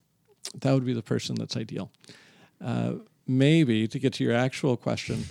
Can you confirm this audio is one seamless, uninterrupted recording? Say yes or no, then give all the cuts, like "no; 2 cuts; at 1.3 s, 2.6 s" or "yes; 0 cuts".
yes; 0 cuts